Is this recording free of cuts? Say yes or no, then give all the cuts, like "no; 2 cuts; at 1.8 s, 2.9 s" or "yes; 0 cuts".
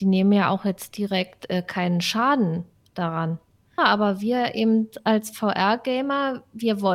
no; 1 cut; at 3.8 s